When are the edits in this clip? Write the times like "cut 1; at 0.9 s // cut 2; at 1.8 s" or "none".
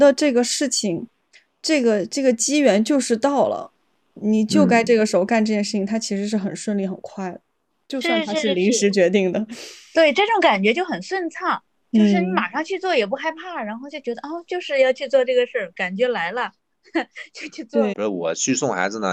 cut 1; at 17.9 s